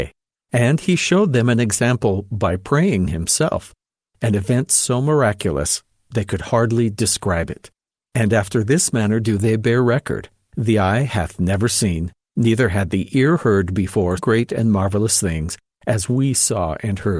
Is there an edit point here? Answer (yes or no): yes